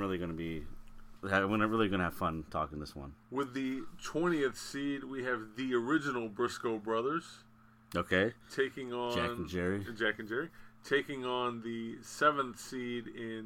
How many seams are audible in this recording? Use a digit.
1